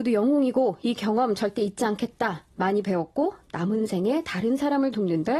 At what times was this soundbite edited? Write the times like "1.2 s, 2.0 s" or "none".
none